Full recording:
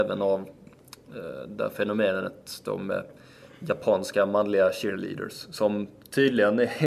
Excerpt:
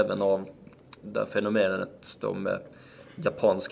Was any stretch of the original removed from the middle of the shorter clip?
yes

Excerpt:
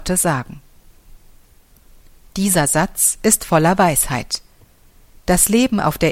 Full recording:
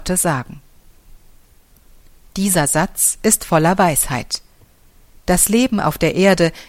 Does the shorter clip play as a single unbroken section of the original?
yes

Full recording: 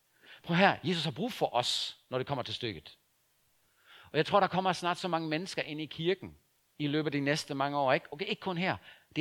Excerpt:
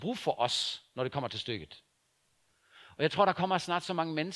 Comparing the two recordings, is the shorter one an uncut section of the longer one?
yes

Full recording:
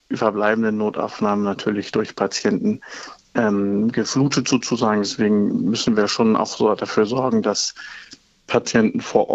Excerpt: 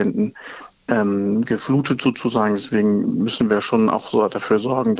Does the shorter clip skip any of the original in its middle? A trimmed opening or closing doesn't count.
no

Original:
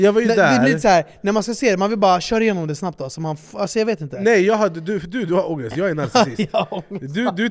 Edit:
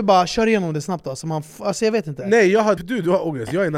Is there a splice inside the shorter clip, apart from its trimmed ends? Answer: yes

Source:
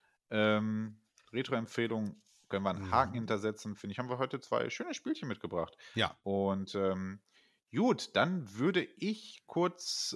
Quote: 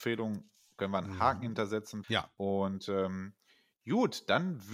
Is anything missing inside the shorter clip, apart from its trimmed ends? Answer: yes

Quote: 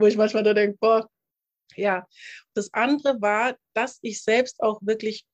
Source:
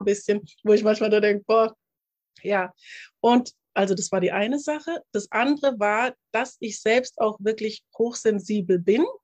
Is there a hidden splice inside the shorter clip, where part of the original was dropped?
yes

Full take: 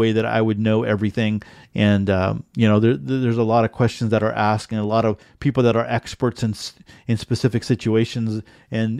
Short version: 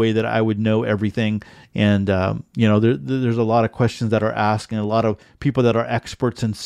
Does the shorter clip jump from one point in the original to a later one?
no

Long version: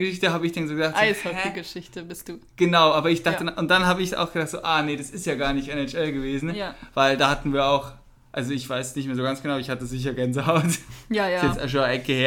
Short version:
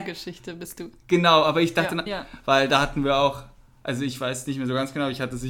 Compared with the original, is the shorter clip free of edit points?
no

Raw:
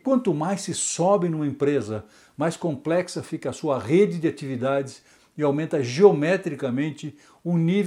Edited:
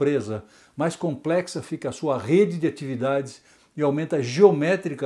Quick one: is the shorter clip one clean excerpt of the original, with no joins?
yes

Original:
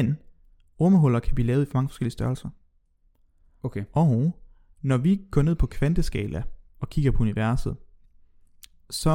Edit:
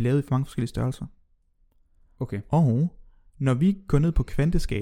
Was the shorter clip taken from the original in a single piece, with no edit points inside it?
yes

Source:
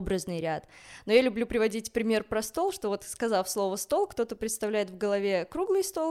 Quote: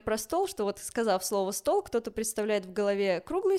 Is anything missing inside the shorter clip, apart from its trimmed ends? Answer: no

